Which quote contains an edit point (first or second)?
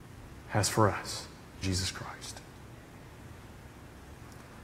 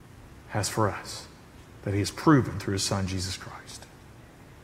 first